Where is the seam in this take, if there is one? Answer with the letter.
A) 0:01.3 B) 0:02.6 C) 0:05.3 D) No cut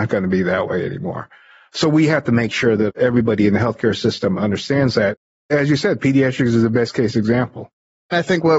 D